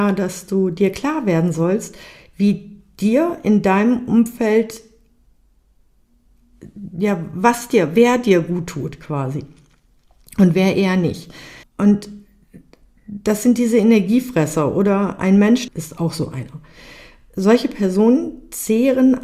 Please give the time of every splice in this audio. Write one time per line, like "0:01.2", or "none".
0:11.6
0:15.7